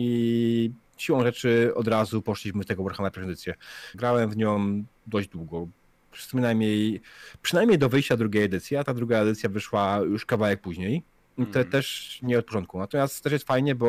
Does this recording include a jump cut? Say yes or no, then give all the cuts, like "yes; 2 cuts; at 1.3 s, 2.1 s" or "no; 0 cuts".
yes; 1 cut; at 3.9 s